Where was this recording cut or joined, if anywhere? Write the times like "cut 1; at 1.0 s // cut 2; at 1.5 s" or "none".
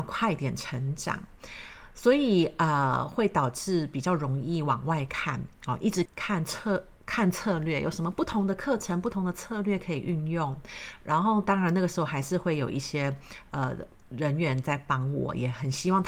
cut 1; at 6.1 s

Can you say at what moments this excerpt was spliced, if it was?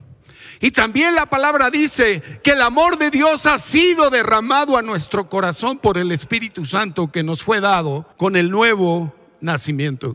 cut 1; at 8.1 s

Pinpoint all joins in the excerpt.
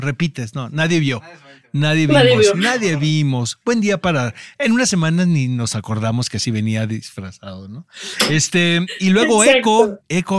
none

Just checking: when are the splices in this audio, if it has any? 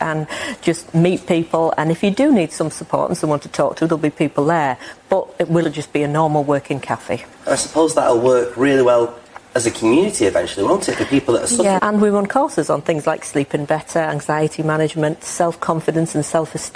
cut 1; at 5.6 s // cut 2; at 11.8 s

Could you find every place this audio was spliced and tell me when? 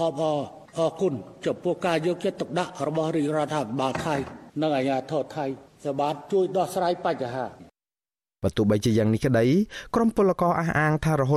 none

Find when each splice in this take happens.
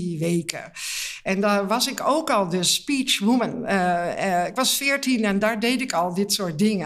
none

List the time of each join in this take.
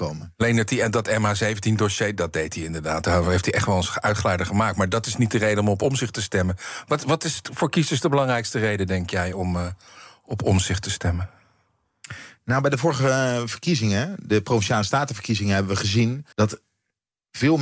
cut 1; at 16.3 s

